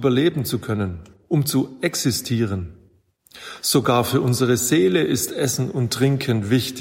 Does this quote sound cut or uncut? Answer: cut